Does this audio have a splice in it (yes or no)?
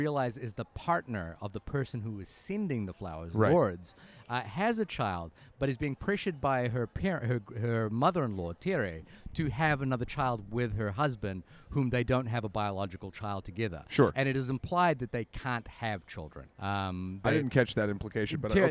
yes